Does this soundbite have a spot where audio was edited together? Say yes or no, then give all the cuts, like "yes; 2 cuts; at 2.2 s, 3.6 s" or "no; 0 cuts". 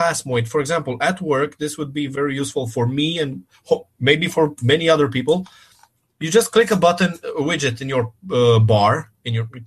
no; 0 cuts